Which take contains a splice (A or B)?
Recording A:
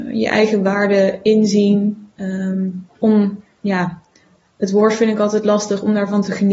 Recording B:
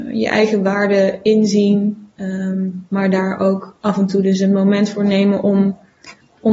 A